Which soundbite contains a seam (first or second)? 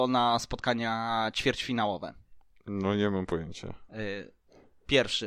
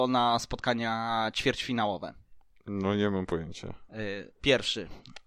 second